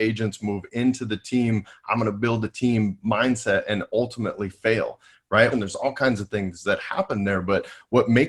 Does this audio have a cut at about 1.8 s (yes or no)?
no